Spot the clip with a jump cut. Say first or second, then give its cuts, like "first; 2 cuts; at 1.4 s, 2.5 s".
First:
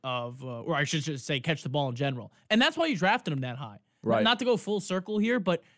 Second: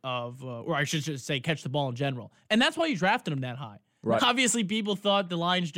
second; 1 cut; at 4.2 s